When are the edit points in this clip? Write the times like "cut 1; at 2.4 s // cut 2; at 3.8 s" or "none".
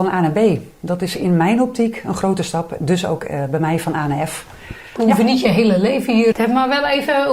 cut 1; at 5.0 s // cut 2; at 6.3 s

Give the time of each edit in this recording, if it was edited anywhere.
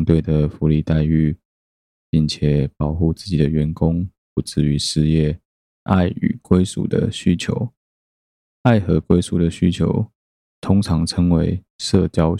cut 1; at 5.7 s

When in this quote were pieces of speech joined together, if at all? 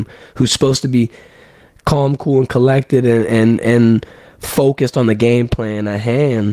none

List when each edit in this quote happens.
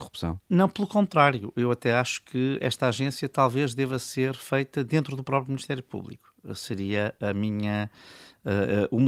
none

